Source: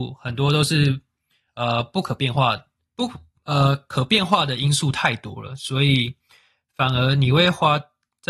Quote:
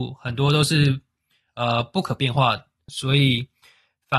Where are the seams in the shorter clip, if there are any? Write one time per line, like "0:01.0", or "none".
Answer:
0:02.9